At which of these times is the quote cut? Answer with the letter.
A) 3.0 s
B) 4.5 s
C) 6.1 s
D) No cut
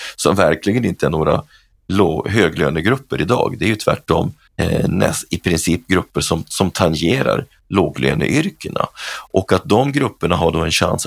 B